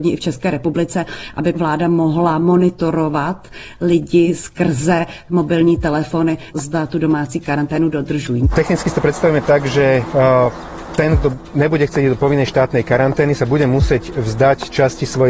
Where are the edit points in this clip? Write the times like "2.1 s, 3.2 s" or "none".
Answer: none